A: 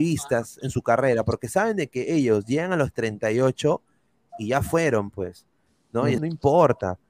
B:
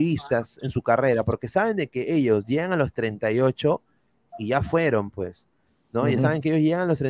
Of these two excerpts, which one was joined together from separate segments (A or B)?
A